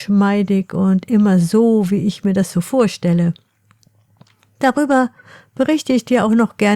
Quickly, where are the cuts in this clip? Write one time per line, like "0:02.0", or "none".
none